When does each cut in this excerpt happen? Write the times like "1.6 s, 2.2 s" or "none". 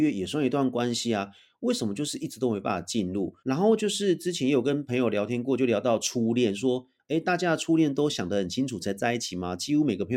3.4 s